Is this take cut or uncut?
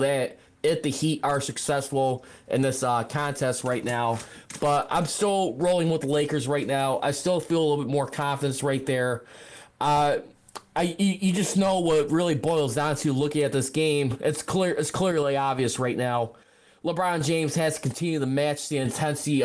uncut